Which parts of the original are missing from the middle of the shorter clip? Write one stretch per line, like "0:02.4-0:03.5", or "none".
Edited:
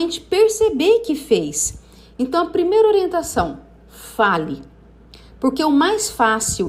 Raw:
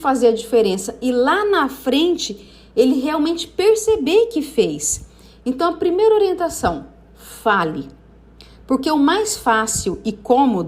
none